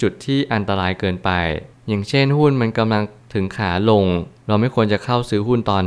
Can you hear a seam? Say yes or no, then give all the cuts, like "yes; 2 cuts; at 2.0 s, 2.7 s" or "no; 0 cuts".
no; 0 cuts